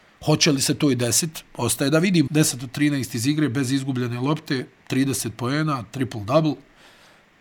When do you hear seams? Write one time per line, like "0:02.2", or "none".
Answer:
0:02.3

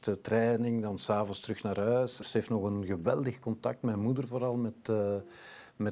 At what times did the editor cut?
0:02.2

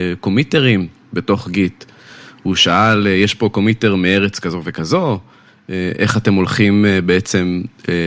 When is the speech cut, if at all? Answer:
none

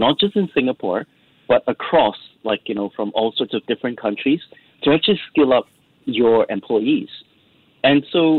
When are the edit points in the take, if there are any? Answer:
none

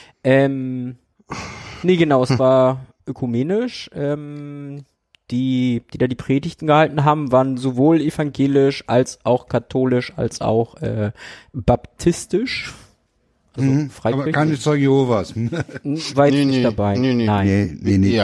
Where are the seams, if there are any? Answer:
none

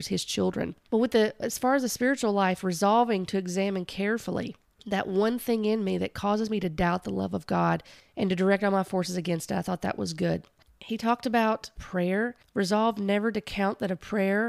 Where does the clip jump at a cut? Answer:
none

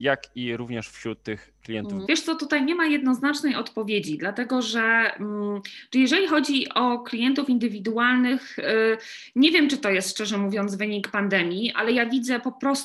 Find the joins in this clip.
0:02.1

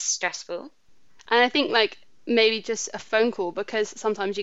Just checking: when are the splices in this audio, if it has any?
0:01.2

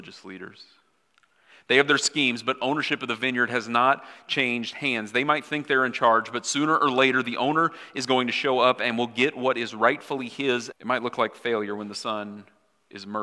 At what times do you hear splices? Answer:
0:10.7

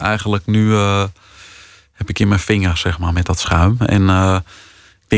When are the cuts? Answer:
none

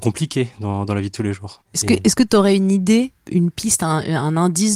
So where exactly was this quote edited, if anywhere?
0:03.3

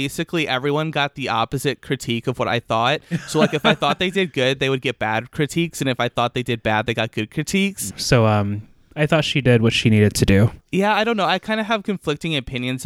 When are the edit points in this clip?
0:07.9
0:10.6

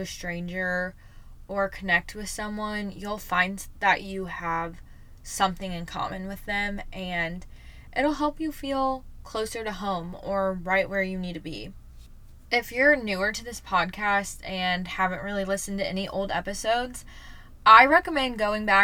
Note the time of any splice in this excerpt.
none

